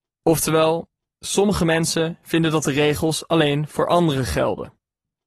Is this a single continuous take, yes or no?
yes